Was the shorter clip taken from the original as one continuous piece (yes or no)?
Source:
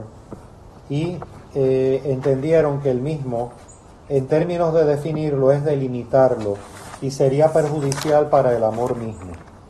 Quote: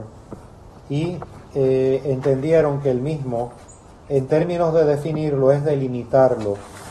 yes